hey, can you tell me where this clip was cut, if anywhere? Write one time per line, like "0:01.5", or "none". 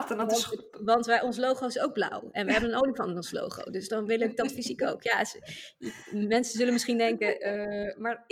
none